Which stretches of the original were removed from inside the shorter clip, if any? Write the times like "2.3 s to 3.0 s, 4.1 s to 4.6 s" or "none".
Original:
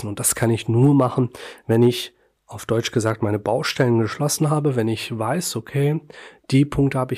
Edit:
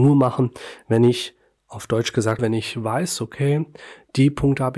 3.2 s to 4.7 s